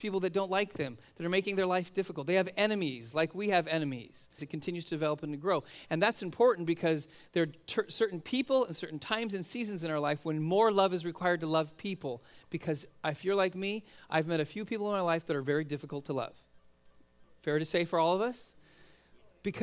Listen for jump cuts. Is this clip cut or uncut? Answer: cut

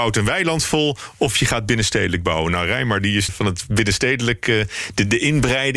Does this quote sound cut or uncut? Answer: cut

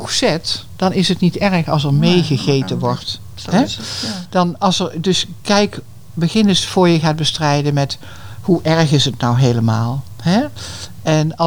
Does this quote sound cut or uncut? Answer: uncut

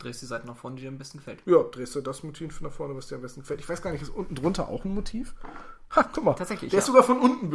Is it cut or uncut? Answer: uncut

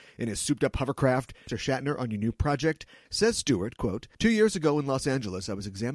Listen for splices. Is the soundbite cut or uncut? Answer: cut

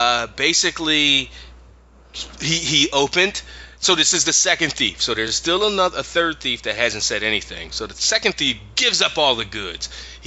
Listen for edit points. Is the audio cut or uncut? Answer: uncut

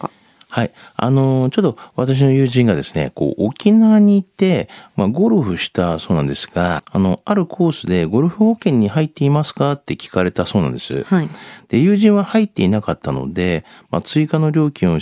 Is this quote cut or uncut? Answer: cut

